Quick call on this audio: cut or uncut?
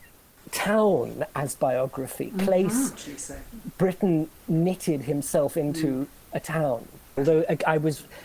cut